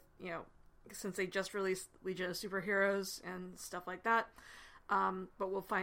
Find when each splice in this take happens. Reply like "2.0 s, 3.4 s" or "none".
none